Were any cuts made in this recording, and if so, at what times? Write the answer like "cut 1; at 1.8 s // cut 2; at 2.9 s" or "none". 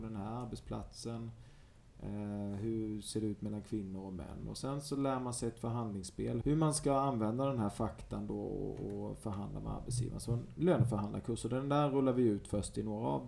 cut 1; at 6.4 s

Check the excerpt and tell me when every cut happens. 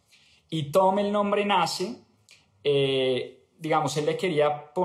none

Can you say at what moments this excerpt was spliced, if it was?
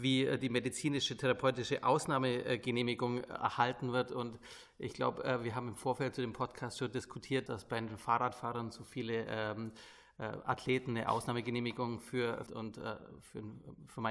cut 1; at 7.5 s // cut 2; at 12.5 s

